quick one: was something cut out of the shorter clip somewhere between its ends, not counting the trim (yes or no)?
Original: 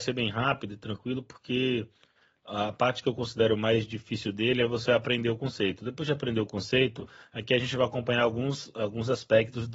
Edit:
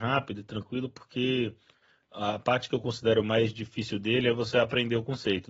no